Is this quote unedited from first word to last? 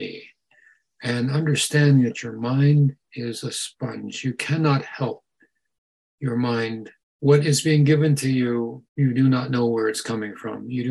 no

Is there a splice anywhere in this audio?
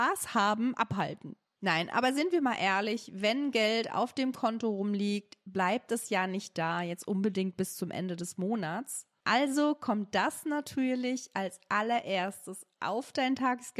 no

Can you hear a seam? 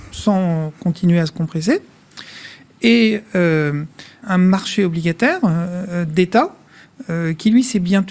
yes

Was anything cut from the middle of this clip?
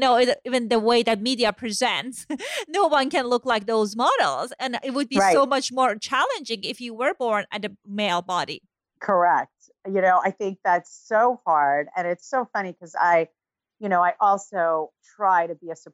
no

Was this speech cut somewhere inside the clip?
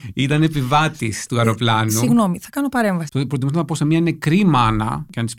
yes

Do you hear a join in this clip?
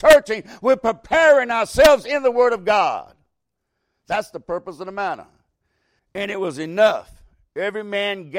yes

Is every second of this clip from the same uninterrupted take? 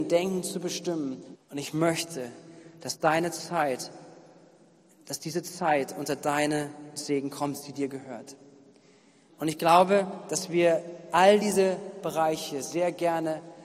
no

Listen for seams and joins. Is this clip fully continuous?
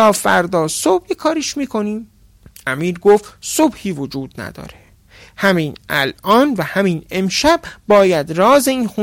yes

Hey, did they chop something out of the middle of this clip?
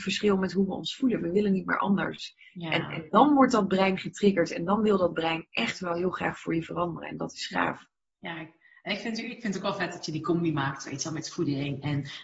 no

